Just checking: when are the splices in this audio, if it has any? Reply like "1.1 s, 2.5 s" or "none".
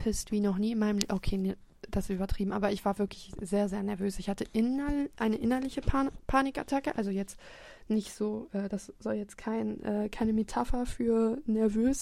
none